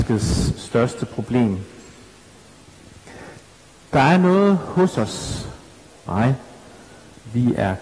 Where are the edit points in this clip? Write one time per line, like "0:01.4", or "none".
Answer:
0:05.9